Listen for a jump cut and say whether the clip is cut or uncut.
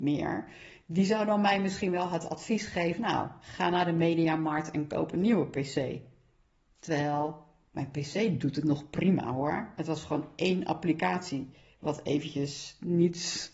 uncut